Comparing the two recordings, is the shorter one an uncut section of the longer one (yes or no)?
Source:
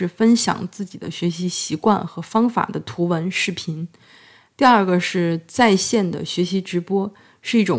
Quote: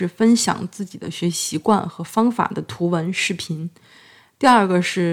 no